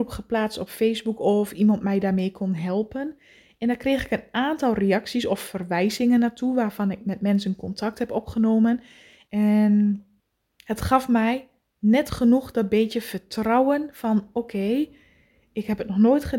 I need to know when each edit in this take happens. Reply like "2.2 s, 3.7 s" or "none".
9.3 s

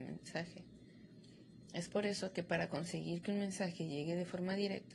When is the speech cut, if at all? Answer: none

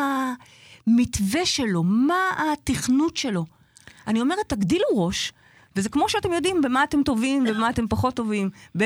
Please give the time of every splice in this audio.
none

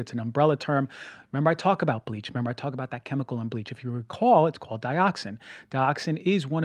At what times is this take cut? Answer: 1.2 s

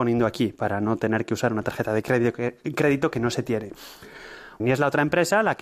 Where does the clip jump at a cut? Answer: 4.6 s

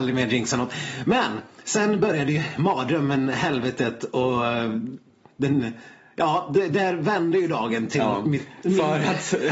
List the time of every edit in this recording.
none

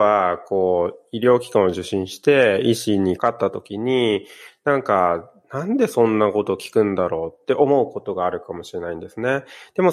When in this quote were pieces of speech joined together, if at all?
3.2 s

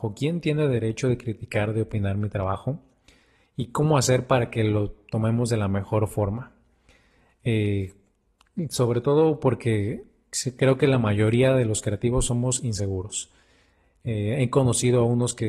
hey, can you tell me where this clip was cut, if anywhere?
none

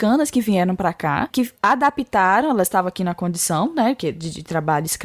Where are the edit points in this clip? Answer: 1.3 s

